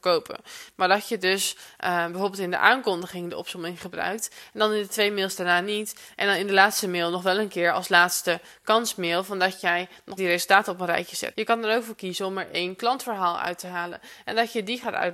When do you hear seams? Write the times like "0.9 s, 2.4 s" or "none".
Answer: 10.2 s, 11.3 s